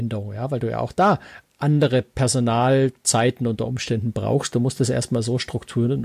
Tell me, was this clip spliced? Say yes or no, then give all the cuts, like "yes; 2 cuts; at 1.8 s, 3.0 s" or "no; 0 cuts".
no; 0 cuts